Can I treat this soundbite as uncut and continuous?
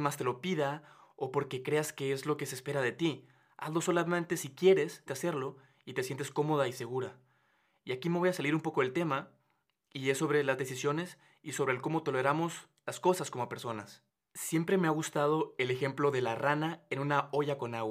no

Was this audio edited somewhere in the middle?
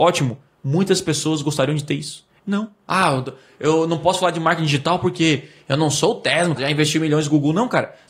yes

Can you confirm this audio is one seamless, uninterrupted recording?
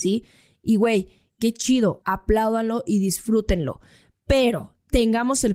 no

